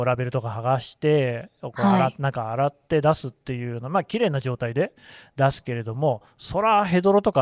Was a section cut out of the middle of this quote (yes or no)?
no